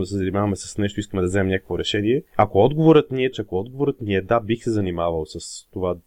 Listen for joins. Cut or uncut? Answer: cut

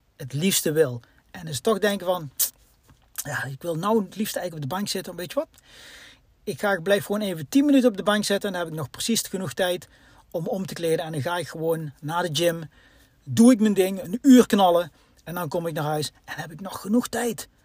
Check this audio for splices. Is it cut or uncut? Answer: uncut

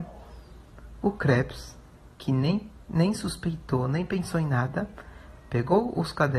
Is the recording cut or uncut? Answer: uncut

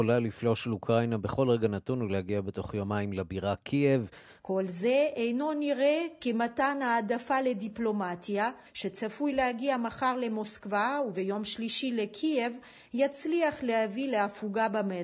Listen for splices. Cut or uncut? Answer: cut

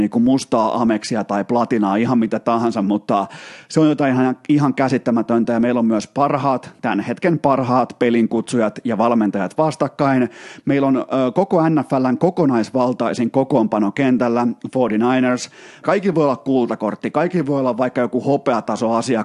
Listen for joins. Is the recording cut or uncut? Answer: cut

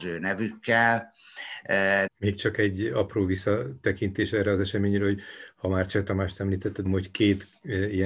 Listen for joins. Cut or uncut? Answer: cut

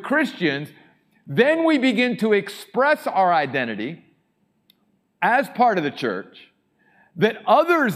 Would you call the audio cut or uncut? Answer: uncut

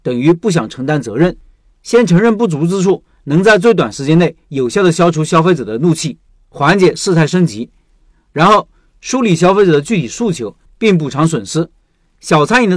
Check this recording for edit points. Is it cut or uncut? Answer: cut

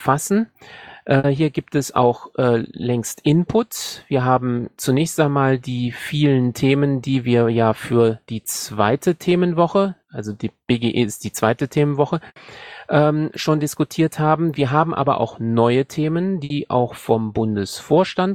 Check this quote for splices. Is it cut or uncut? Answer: uncut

